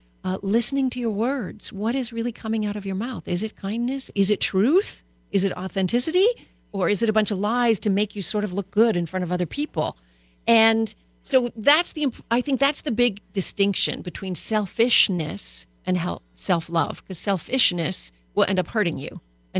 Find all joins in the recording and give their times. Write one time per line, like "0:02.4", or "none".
none